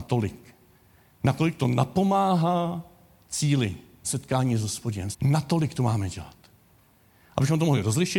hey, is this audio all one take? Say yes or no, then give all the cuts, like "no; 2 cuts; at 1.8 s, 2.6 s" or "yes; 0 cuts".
no; 2 cuts; at 4.0 s, 5.1 s